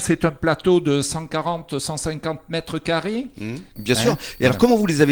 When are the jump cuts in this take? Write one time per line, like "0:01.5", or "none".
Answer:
0:03.8